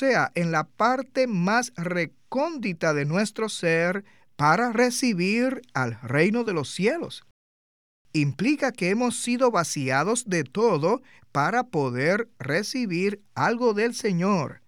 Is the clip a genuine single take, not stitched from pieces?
yes; 0 cuts

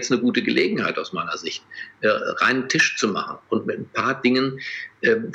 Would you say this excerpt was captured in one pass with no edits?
yes; 0 cuts

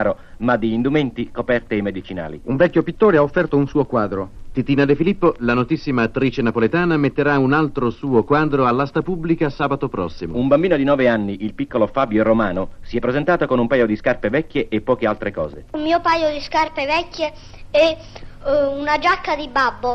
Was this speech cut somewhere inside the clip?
no; 0 cuts

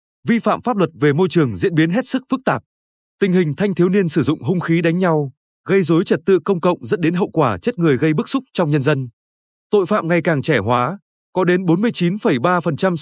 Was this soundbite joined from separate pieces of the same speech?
no; 0 cuts

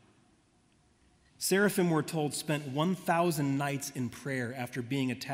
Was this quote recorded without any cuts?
no; 1 cut; at 1.3 s

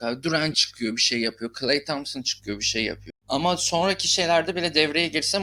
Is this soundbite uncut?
no; 1 cut; at 3.1 s

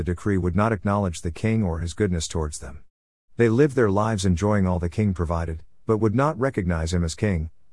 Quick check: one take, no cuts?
yes; 0 cuts

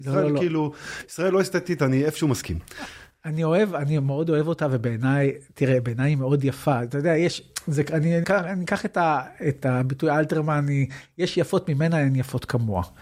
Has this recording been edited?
yes; 1 cut; at 8.2 s

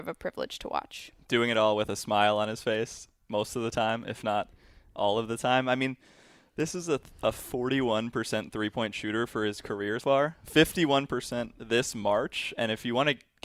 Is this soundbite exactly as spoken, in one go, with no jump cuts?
no; 1 cut; at 10.0 s

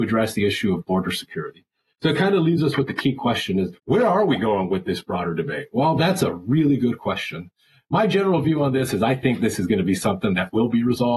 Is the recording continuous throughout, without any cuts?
no; 1 cut; at 3.8 s

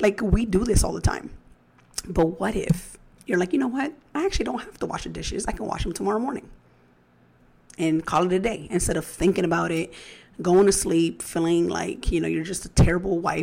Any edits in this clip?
no; 0 cuts

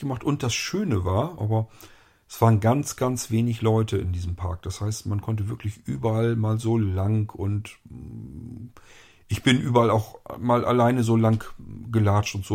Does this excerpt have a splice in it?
yes; 1 cut; at 1.4 s

